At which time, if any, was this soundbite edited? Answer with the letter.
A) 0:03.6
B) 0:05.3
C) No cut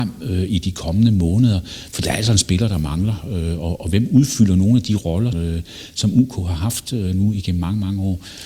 B